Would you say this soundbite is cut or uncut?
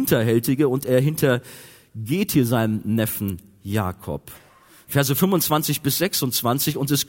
uncut